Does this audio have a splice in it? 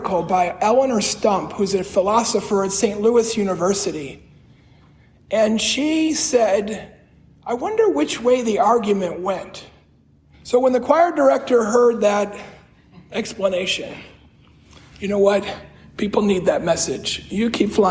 yes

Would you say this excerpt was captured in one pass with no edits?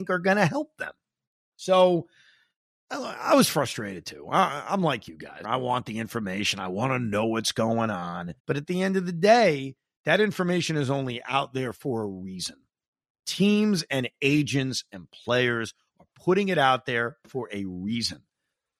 no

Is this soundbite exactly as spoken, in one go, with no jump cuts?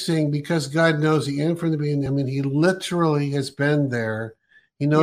yes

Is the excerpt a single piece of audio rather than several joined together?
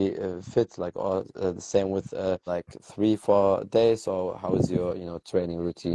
no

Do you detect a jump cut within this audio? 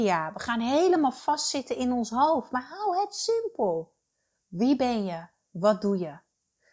no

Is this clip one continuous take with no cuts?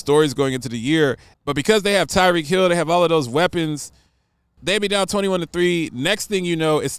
no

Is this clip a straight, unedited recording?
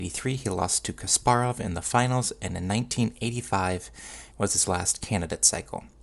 no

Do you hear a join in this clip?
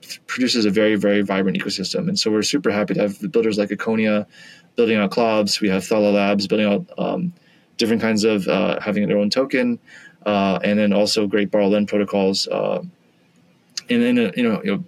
yes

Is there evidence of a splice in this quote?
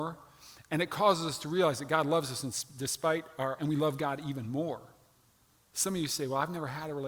yes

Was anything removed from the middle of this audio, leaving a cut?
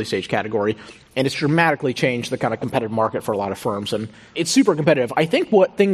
no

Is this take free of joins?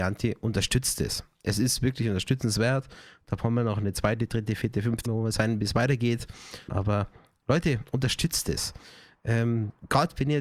no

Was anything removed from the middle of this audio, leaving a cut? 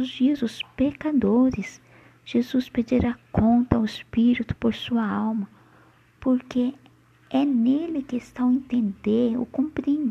no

